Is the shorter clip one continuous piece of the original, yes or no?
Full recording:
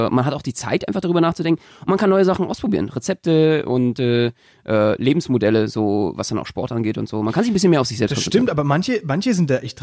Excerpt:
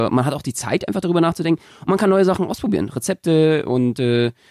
yes